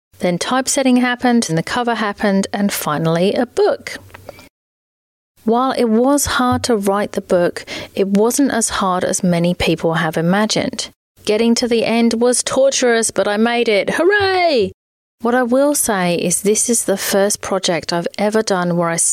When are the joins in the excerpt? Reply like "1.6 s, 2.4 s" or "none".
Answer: 1.5 s, 11.1 s, 15.0 s